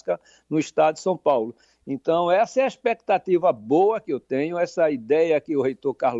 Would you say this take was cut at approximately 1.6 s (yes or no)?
yes